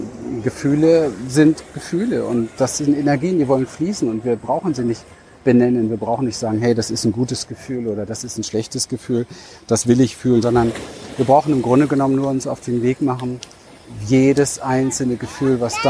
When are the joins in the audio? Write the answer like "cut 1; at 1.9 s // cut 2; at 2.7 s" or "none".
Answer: cut 1; at 10.4 s